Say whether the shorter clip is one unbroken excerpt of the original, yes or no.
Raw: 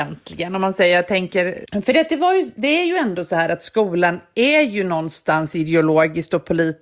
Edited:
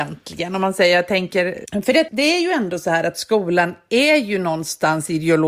no